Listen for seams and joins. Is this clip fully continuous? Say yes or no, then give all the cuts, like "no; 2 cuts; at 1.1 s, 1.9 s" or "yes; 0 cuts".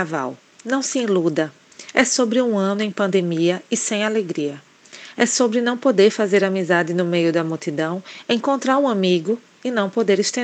no; 1 cut; at 5.1 s